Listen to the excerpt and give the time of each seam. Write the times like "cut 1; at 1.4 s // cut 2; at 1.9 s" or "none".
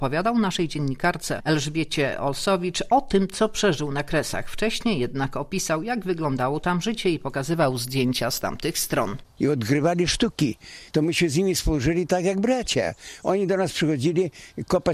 cut 1; at 9.2 s // cut 2; at 10.9 s

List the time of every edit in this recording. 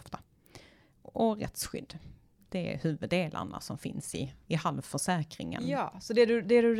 none

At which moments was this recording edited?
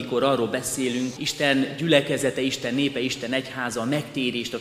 cut 1; at 1.2 s

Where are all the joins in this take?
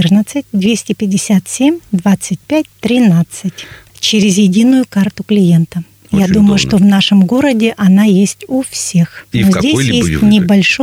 cut 1; at 3.8 s // cut 2; at 9.3 s

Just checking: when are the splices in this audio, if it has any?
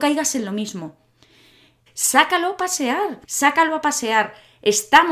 cut 1; at 1.9 s // cut 2; at 3.2 s

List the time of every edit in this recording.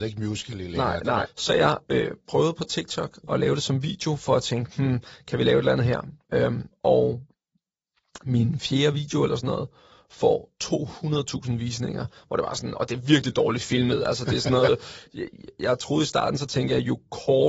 cut 1; at 1.3 s

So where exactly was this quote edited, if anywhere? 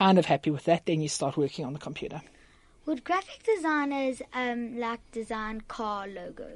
none

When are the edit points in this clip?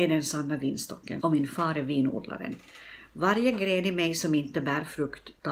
cut 1; at 1.2 s

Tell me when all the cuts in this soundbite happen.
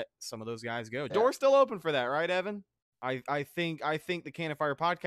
cut 1; at 1.1 s // cut 2; at 2.9 s

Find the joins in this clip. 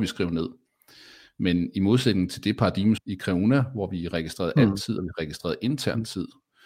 cut 1; at 3.0 s

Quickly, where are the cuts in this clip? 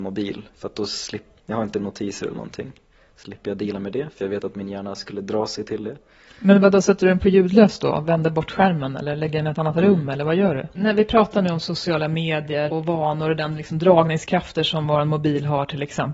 cut 1; at 1.4 s // cut 2; at 10.7 s // cut 3; at 12.7 s

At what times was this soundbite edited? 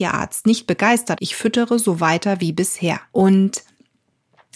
cut 1; at 1.2 s // cut 2; at 3.1 s

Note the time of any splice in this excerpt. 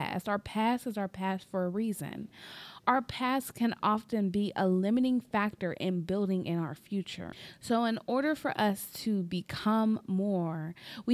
none

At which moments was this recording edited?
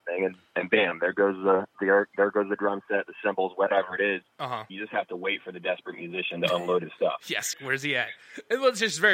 cut 1; at 4.7 s // cut 2; at 7.5 s

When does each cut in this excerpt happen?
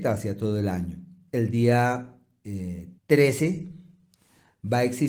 cut 1; at 1.3 s // cut 2; at 3.0 s

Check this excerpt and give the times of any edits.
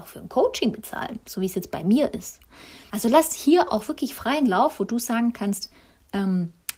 cut 1; at 2.9 s

